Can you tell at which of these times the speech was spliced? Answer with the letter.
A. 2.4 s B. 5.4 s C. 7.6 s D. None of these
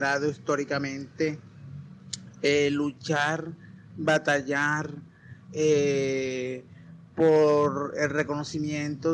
D